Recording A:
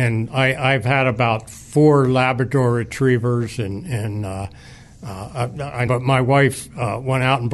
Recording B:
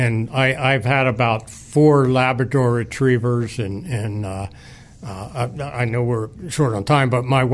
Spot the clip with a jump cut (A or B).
A